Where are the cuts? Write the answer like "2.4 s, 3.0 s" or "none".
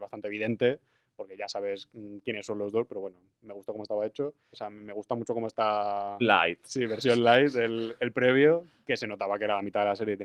4.5 s, 6.2 s